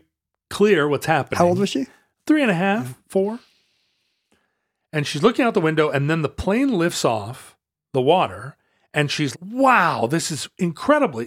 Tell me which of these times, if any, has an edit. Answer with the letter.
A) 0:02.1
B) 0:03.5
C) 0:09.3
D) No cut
C